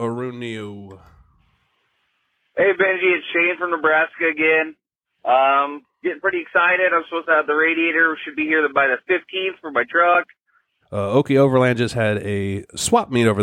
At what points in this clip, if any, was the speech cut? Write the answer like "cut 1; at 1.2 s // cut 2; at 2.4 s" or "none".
cut 1; at 10.8 s

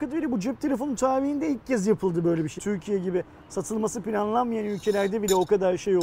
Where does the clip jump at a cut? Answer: cut 1; at 2.6 s

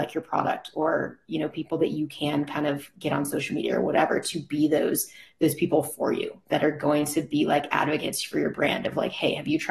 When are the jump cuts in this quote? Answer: none

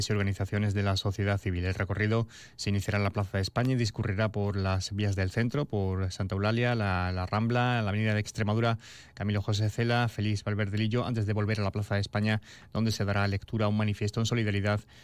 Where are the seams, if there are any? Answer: none

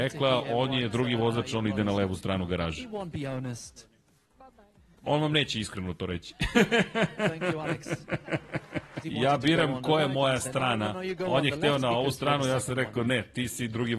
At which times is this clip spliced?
cut 1; at 9.0 s

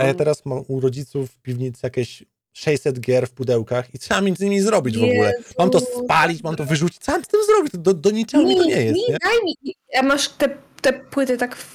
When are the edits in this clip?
cut 1; at 9.2 s

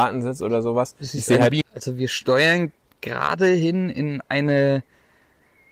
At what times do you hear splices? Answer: cut 1; at 1.6 s

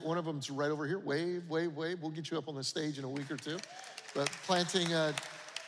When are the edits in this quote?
none

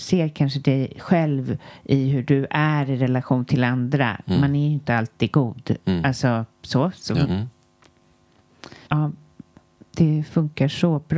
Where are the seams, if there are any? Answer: cut 1; at 7.2 s // cut 2; at 8.9 s

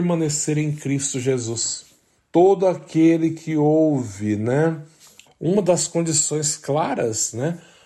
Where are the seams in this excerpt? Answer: cut 1; at 2.2 s // cut 2; at 5.3 s

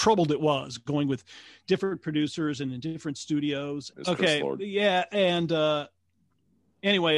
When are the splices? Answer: cut 1; at 3.9 s

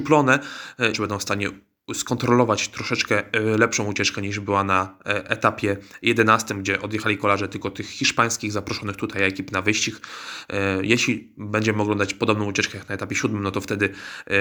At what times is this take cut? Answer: cut 1; at 0.9 s

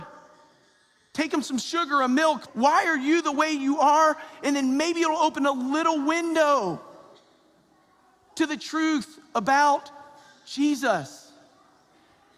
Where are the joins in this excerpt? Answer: cut 1; at 2.5 s

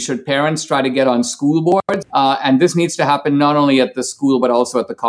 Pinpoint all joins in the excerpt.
cut 1; at 2.0 s

